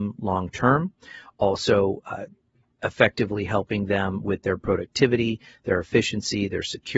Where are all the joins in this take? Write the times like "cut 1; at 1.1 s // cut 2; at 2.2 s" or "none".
none